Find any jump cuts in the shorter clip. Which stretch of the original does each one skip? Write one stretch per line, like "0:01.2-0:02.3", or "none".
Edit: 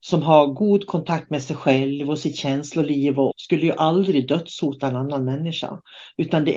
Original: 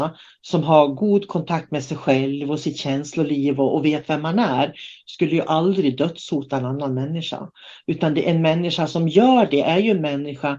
0:03.7-0:05.0